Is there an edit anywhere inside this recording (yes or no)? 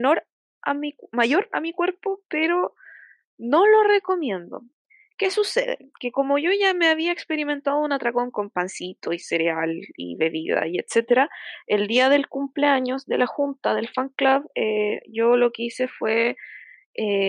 yes